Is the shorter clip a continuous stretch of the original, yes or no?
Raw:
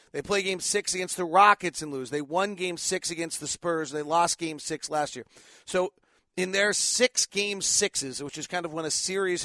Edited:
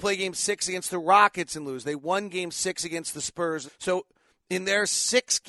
no